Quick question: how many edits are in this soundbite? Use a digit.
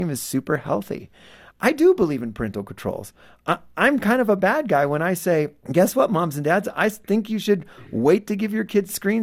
1